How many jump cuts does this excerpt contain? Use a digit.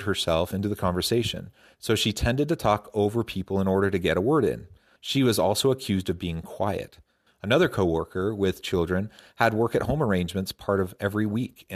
2